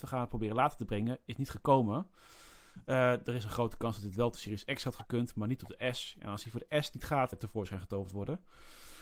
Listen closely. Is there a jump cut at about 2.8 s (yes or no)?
no